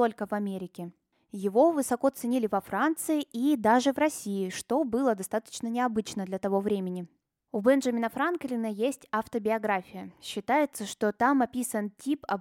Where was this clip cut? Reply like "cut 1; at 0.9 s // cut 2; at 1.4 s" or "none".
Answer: none